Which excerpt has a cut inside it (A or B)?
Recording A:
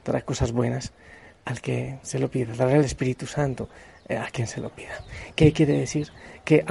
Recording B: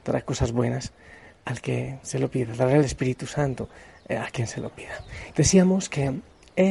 B